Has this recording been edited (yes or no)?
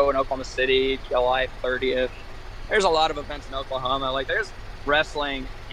no